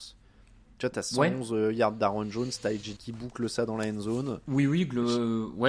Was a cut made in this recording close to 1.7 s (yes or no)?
no